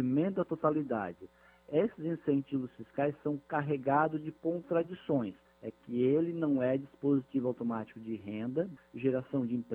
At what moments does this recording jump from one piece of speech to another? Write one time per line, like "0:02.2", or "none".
0:05.5
0:08.8